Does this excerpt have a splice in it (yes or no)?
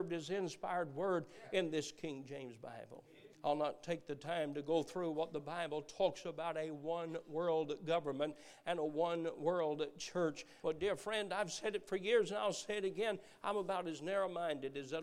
yes